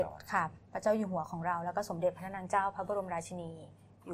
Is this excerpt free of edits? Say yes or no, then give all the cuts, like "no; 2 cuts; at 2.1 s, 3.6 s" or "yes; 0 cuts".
yes; 0 cuts